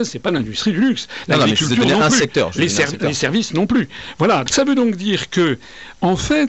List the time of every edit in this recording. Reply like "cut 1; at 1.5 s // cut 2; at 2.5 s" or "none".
cut 1; at 4.5 s